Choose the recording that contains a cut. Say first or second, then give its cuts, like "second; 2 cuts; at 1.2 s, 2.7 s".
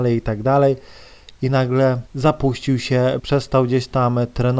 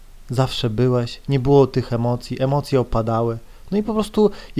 first; 2 cuts; at 2.1 s, 3.2 s